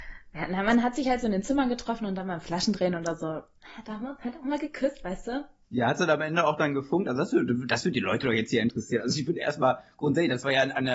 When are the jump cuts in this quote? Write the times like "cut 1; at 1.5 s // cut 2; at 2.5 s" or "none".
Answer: cut 1; at 5.6 s